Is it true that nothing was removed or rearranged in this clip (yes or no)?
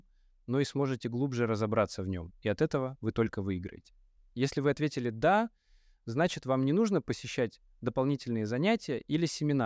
no